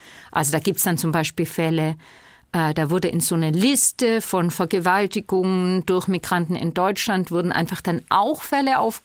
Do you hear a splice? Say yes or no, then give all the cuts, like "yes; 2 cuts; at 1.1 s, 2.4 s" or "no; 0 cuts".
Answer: no; 0 cuts